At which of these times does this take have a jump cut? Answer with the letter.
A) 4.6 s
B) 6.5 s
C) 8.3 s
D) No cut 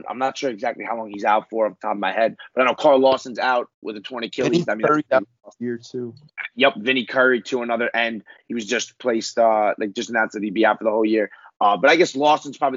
D